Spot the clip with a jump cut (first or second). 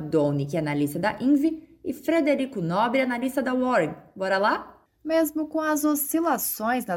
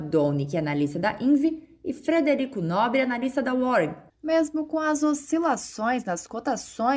second